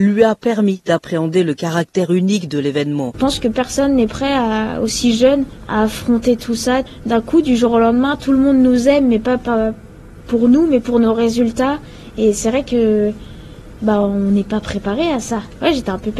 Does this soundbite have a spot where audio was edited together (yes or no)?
no